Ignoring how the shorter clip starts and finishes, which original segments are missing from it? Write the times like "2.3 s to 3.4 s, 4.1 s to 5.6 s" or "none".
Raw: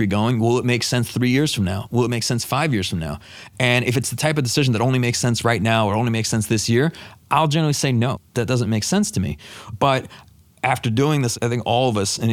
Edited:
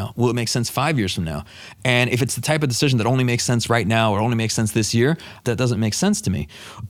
7.2 s to 8.3 s